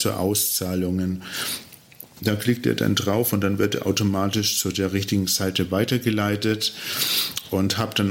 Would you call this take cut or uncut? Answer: cut